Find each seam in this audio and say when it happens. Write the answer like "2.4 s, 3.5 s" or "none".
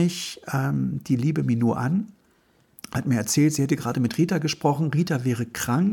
none